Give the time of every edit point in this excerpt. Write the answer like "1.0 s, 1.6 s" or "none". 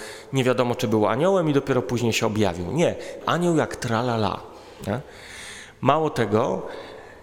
3.2 s